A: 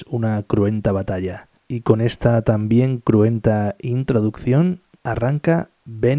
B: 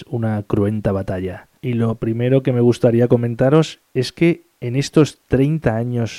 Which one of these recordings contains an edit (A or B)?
B